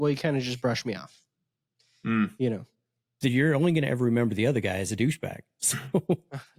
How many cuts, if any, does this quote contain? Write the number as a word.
one